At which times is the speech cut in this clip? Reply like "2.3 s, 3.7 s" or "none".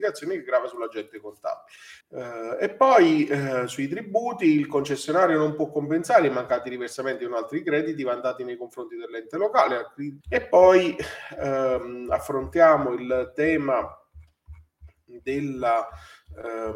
2.0 s, 10.2 s